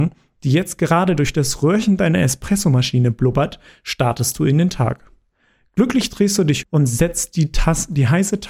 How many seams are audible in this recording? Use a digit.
1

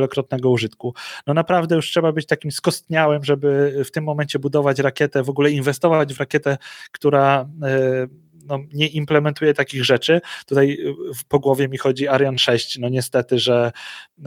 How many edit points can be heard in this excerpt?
0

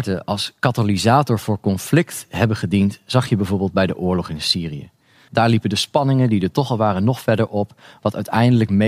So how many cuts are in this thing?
1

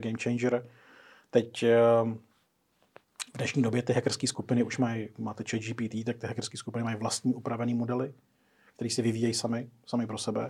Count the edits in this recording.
0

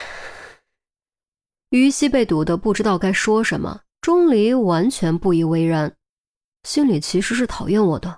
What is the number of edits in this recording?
2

